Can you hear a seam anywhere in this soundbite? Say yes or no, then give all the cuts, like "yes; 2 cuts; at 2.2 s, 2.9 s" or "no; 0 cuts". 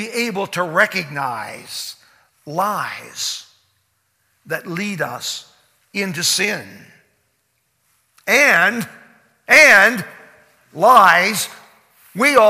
no; 0 cuts